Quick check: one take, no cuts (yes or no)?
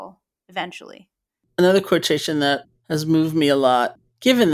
no